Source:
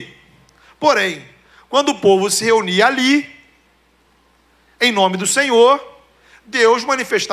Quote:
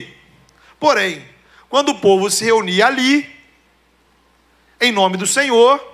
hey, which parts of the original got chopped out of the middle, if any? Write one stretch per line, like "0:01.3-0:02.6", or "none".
none